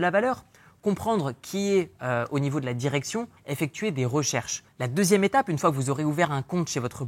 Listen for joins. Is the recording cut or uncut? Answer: cut